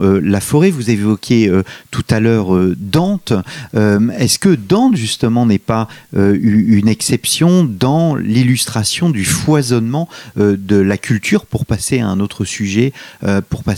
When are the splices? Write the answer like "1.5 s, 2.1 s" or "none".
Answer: none

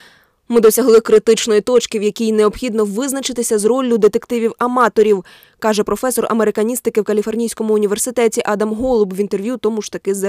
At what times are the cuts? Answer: none

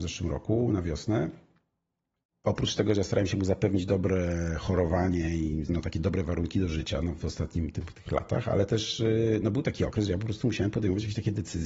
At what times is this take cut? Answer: none

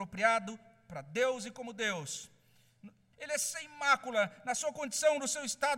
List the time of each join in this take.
3.1 s

